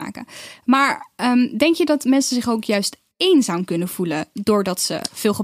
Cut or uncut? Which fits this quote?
uncut